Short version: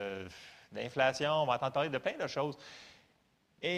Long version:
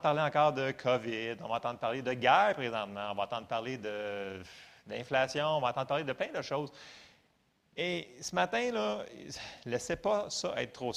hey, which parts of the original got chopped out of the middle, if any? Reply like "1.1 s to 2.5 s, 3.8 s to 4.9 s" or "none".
none

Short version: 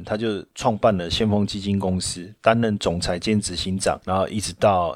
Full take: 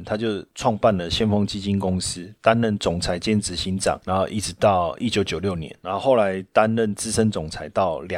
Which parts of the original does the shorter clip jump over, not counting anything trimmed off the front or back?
none

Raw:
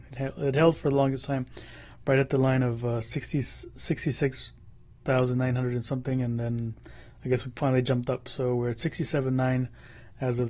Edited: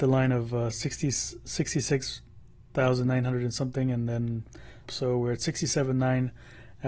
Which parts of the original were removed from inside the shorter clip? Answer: 7.1 s to 8.2 s

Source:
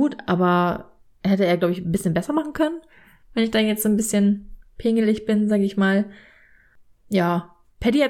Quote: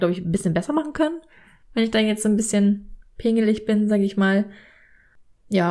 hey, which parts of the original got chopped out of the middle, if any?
none

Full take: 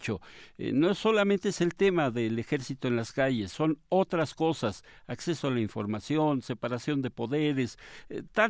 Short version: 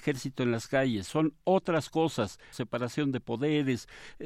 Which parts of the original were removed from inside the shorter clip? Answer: 5.0 s to 6.4 s

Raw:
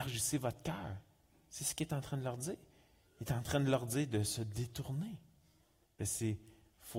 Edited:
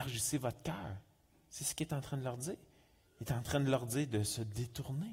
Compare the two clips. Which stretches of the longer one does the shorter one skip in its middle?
none

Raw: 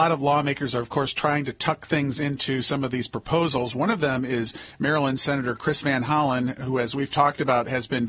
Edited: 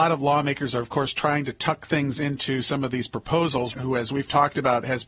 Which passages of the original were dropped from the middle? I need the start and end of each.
3.7 s to 6.6 s

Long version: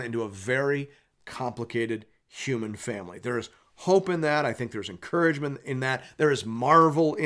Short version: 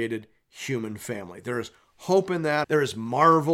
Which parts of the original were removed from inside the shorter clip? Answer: 4.4 s to 6.1 s

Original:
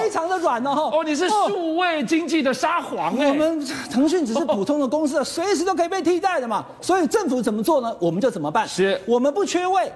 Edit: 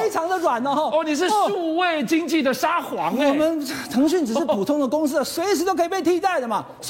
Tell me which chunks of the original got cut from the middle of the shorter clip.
none

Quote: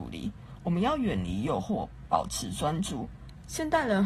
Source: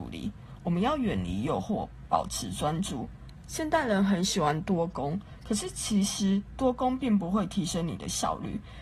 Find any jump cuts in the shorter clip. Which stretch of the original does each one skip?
none

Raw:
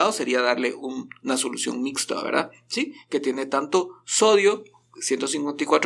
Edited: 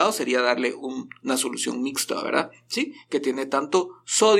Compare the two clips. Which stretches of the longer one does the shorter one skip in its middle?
none

